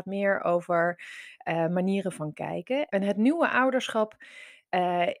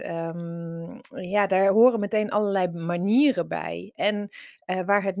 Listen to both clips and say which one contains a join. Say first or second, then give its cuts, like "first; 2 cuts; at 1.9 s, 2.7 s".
first; 1 cut; at 2.9 s